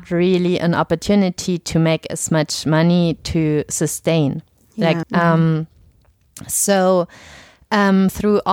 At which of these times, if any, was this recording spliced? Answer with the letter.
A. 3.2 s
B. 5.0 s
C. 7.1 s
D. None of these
B